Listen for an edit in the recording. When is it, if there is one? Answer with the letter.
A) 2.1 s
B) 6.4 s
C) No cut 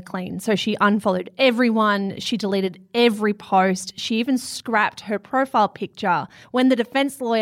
B